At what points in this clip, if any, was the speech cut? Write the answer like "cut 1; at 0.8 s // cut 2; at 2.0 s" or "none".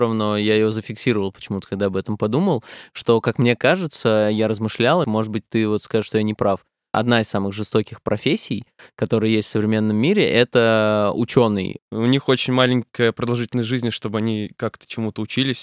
cut 1; at 5.0 s // cut 2; at 6.9 s // cut 3; at 11.8 s